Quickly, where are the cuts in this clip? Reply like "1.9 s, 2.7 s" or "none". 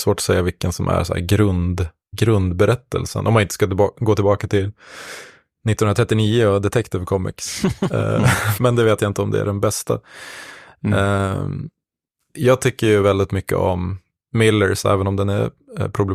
2.1 s, 8.6 s